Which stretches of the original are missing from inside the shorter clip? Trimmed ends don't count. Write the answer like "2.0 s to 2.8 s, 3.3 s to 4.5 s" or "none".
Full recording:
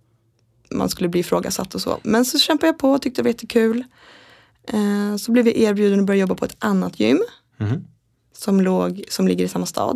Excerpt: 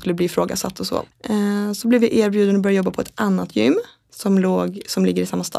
2.0 s to 4.5 s, 7.5 s to 8.2 s